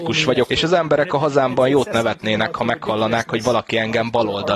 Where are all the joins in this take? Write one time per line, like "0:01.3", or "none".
none